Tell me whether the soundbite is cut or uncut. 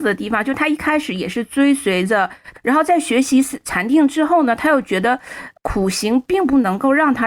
cut